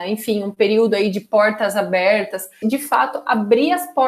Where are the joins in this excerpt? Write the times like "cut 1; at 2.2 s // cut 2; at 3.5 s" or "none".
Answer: cut 1; at 2.6 s